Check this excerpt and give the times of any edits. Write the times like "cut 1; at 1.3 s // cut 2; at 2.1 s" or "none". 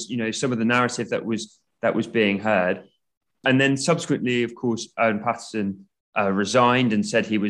none